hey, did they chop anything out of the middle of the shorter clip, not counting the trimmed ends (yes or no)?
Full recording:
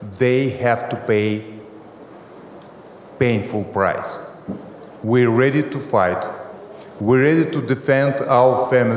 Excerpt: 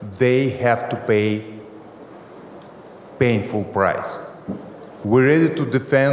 yes